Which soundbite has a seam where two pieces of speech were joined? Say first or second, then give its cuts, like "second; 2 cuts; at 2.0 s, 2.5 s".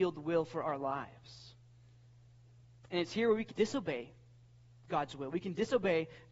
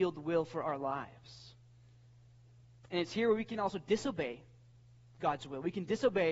first; 1 cut; at 3.5 s